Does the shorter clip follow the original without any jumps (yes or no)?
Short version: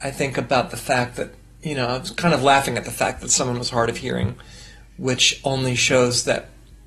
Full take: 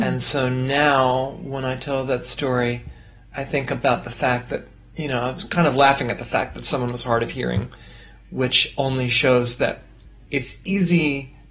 yes